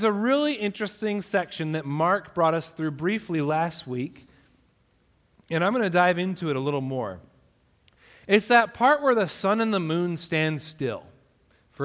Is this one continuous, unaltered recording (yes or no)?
yes